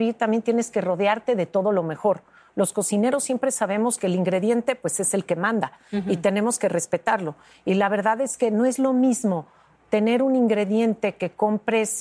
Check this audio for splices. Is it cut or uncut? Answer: uncut